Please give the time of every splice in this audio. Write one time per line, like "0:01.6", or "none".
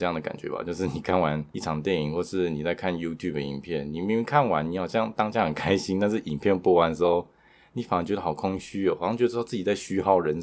none